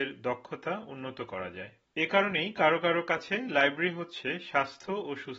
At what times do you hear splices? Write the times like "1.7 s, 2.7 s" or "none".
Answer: none